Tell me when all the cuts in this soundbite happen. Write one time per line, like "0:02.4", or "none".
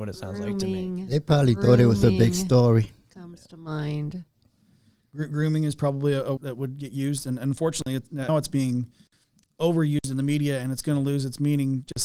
0:06.4
0:08.3